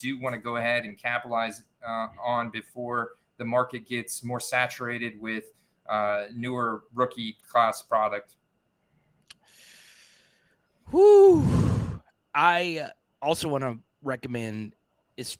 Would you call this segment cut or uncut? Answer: uncut